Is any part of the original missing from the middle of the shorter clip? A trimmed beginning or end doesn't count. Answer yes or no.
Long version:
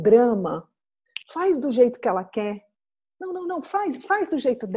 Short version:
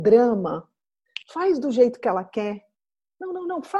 no